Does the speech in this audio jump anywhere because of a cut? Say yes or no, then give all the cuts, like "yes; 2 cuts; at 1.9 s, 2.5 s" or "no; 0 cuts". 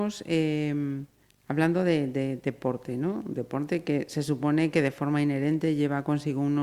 no; 0 cuts